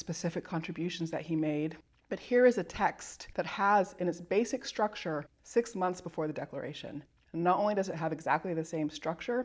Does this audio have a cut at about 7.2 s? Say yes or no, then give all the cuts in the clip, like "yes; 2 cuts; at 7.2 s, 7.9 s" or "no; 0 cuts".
no; 1 cut; at 5.3 s